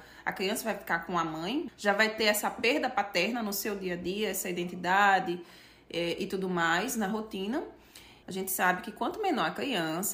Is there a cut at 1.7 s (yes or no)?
yes